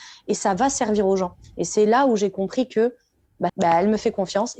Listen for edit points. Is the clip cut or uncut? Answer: cut